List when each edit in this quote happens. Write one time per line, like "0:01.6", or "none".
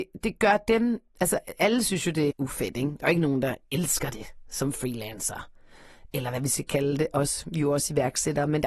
0:02.3